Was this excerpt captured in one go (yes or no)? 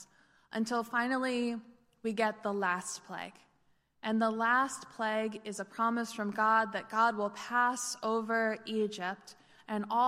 yes